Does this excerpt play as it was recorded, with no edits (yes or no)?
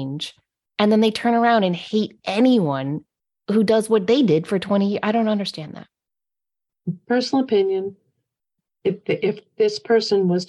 yes